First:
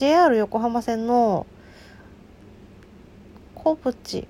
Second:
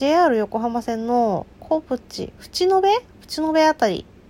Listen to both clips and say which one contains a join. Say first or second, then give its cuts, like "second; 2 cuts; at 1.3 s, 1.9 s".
second; 1 cut; at 1.5 s